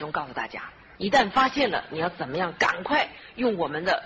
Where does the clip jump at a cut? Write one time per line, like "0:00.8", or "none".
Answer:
0:00.9